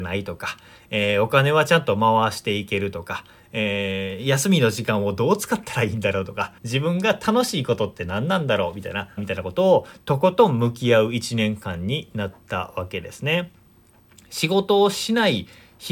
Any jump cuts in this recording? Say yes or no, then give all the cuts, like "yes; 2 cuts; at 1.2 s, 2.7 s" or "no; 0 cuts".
yes; 2 cuts; at 6.6 s, 9.2 s